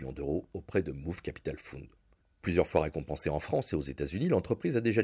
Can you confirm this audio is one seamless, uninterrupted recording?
no; 1 cut; at 2.2 s

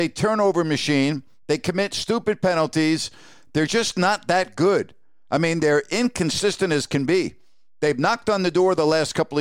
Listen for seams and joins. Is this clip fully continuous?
yes; 0 cuts

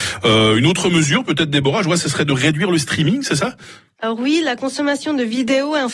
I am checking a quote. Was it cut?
no; 0 cuts

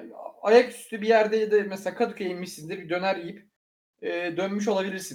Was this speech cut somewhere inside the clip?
no; 0 cuts

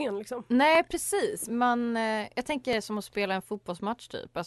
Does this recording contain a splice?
yes; 1 cut; at 1.5 s

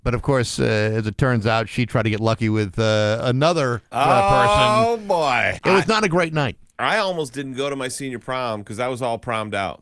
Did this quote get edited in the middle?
yes; 1 cut; at 5.6 s

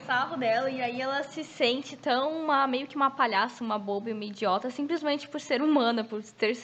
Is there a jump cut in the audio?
no; 0 cuts

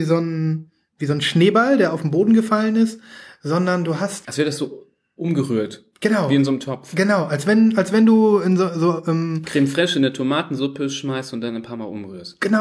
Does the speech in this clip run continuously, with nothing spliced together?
no; 1 cut; at 4.2 s

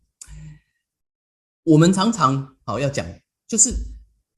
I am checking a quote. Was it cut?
no; 0 cuts

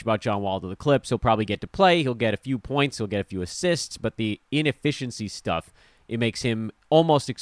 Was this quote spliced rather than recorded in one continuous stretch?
no; 0 cuts

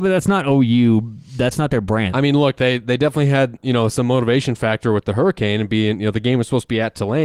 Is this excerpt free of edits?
no; 1 cut; at 2.1 s

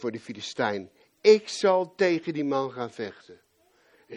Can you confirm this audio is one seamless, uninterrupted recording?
yes; 0 cuts

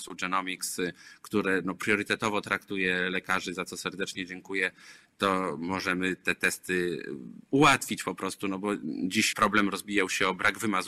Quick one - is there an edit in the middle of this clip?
yes; 2 cuts; at 7.5 s, 9.3 s

